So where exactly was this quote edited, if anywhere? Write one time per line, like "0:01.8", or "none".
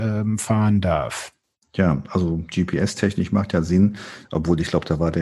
0:01.6